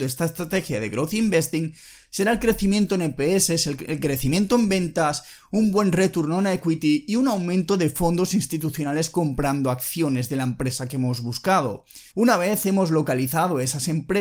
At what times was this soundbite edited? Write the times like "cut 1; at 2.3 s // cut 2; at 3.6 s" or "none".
cut 1; at 12.1 s

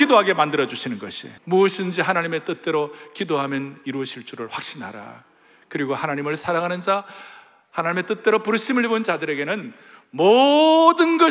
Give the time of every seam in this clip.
cut 1; at 1.4 s

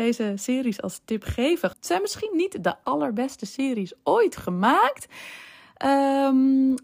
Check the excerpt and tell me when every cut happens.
cut 1; at 1.7 s // cut 2; at 2.8 s

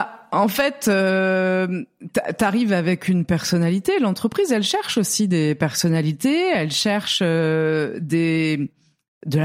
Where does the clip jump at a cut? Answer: none

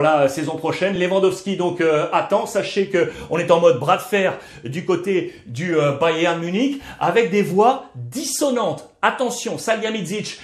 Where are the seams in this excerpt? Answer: none

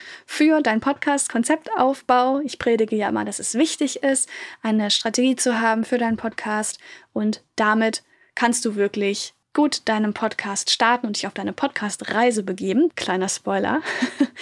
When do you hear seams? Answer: cut 1; at 9.4 s // cut 2; at 12.9 s

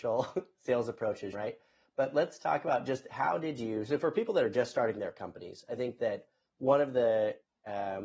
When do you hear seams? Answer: cut 1; at 1.3 s

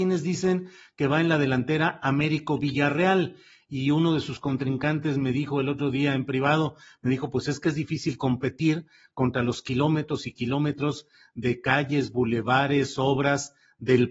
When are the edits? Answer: none

